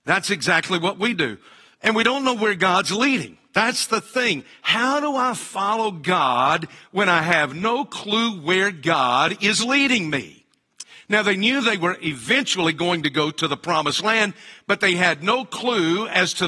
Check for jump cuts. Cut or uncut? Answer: uncut